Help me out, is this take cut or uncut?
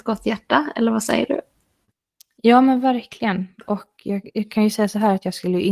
uncut